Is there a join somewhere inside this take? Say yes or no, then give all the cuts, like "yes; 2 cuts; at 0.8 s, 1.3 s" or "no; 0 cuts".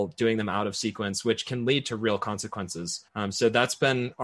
yes; 1 cut; at 3.1 s